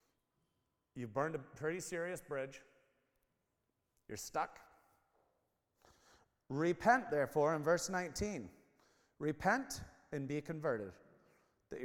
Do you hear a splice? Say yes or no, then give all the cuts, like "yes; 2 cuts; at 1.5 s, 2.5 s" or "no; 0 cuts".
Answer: no; 0 cuts